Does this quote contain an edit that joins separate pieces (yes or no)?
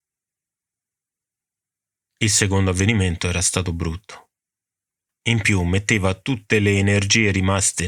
yes